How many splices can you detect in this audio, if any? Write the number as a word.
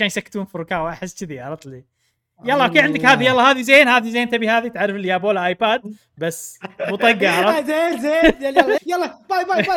one